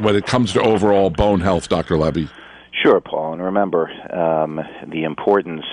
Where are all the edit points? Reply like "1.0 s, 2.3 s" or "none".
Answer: none